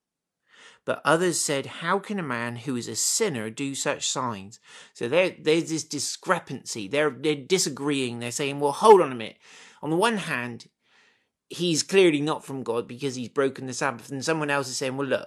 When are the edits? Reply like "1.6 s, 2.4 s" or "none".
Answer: none